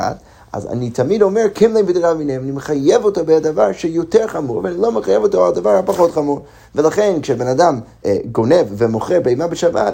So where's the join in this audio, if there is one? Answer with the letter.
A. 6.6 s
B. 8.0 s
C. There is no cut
B